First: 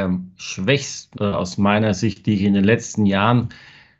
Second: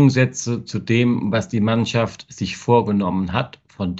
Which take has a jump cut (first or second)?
first